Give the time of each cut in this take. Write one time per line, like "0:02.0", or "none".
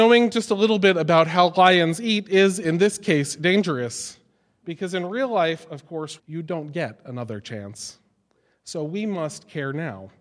0:06.2